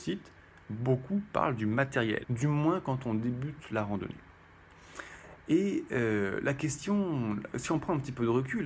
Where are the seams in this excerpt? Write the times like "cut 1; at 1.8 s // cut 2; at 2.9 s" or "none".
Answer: cut 1; at 2.2 s